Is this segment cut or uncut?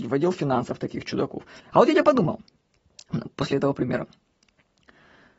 cut